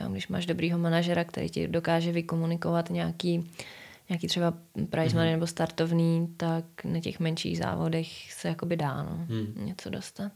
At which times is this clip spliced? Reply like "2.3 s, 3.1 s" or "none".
none

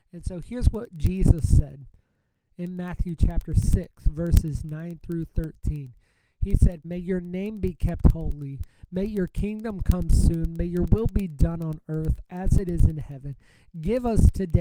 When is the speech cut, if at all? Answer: 6.8 s

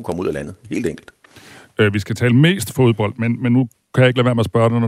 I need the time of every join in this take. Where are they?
none

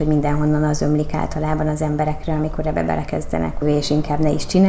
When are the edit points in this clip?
3.6 s

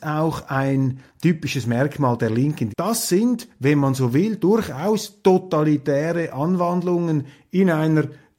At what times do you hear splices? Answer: 2.7 s

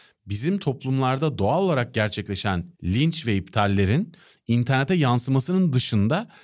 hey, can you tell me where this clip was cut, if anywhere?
2.7 s

